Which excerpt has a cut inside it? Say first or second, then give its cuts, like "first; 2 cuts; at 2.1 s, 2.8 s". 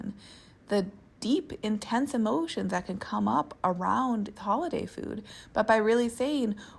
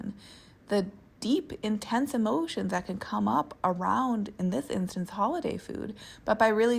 first; 1 cut; at 4.4 s